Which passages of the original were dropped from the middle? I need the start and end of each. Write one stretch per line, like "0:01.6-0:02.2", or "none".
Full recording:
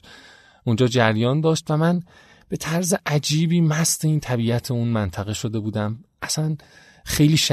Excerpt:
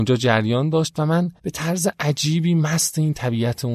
0:02.1-0:02.4